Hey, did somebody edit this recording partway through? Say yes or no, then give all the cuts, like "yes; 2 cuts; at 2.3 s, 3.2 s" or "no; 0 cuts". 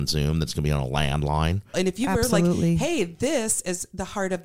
yes; 1 cut; at 1.7 s